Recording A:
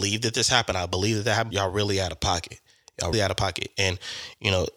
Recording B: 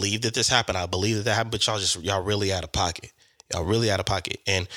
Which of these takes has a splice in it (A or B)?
A